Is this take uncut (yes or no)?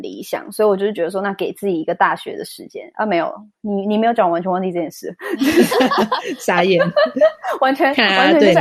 yes